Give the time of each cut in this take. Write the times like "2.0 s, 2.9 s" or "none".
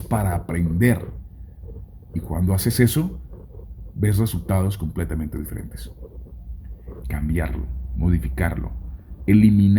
7.0 s

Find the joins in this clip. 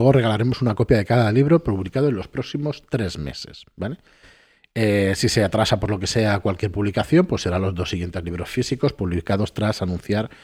none

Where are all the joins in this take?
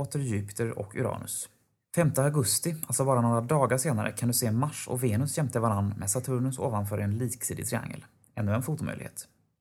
none

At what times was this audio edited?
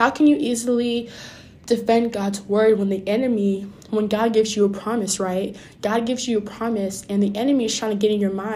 3.9 s

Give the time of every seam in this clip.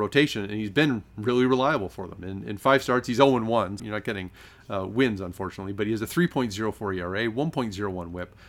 3.8 s

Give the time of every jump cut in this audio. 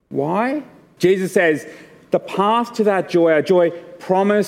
1.0 s

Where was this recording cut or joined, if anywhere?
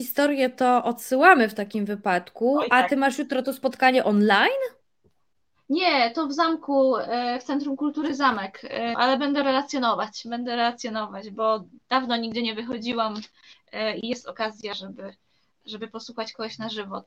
8.9 s

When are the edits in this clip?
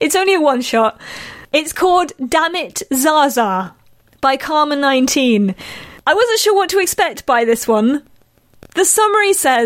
none

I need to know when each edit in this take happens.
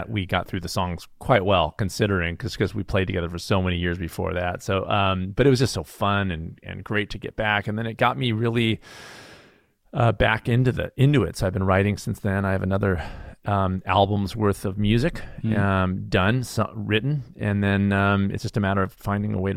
none

